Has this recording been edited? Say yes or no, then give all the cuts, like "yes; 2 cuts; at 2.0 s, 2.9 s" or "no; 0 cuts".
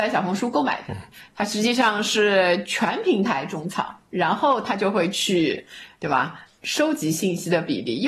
yes; 1 cut; at 6.5 s